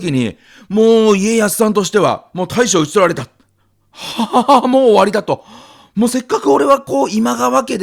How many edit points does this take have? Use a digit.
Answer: 0